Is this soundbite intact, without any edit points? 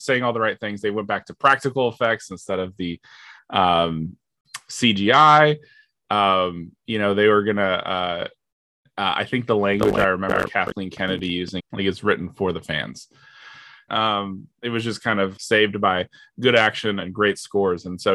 no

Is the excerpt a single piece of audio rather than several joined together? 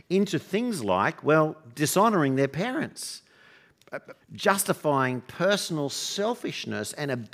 no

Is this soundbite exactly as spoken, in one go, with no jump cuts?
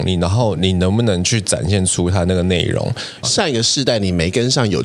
no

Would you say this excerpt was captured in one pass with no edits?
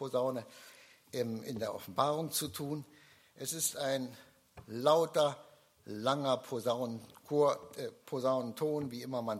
yes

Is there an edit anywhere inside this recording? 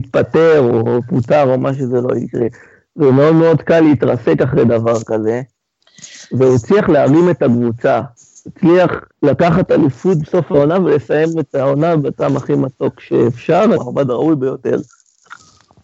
yes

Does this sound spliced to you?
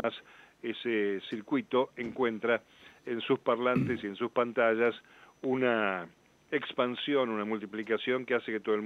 no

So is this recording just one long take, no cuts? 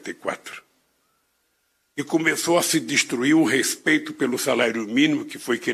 no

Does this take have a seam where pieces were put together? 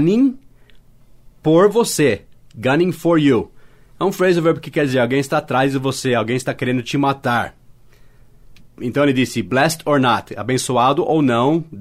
no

